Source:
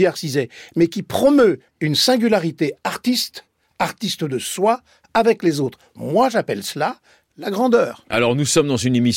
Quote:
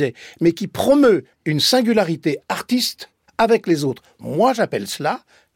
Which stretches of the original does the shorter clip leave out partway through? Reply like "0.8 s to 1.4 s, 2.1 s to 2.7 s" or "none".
3.6 s to 5.0 s